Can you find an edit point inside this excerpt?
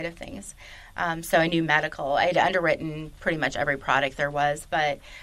no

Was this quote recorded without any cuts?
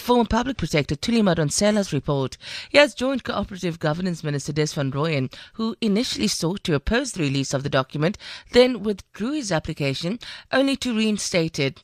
yes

